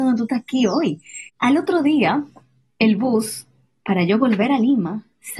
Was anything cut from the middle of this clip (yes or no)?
yes